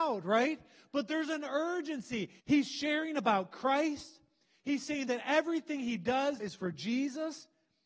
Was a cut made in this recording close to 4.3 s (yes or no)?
no